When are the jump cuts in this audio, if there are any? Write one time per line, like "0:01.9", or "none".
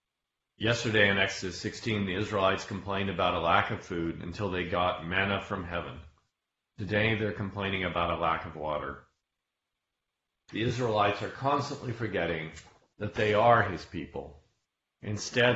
0:10.5